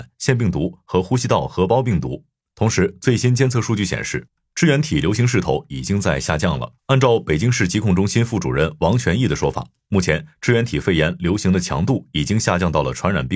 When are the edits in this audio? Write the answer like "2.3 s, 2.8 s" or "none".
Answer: 2.4 s, 6.8 s